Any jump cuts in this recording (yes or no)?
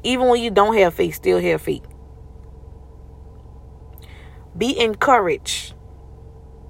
no